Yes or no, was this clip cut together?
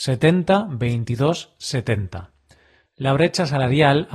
yes